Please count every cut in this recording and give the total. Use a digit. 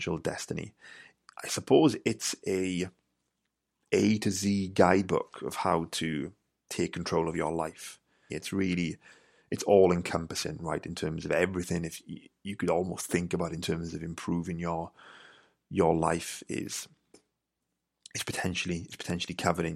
1